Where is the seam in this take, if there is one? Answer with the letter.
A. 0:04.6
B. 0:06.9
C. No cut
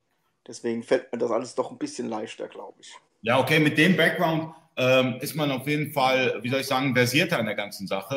C